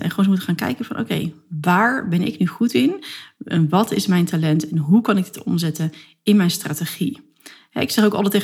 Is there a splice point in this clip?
no; 0 cuts

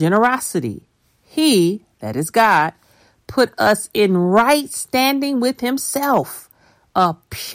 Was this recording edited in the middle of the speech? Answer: no; 0 cuts

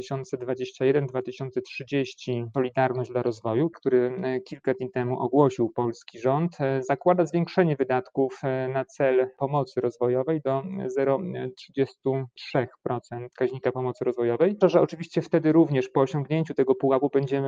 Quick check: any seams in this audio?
yes; 2 cuts; at 3.7 s, 14.6 s

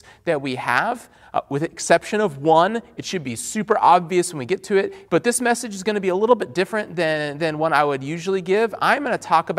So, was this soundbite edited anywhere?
yes; 1 cut; at 5.0 s

